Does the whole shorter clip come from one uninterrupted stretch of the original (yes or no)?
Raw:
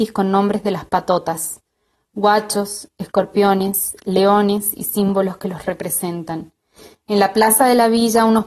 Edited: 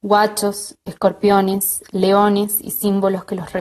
yes